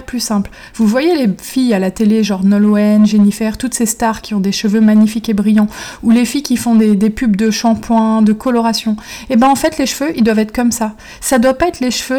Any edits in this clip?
no; 0 cuts

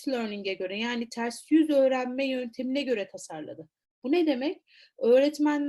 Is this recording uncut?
yes; 0 cuts

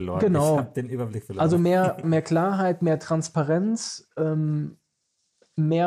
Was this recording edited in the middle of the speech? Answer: yes; 1 cut; at 2.0 s

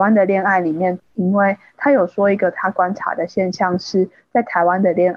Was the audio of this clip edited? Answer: yes; 1 cut; at 1.0 s

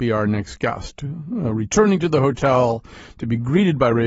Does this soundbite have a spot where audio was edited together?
no; 0 cuts

